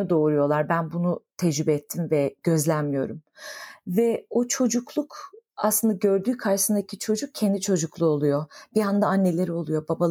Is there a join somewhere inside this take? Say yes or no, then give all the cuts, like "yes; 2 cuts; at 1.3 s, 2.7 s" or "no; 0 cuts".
no; 0 cuts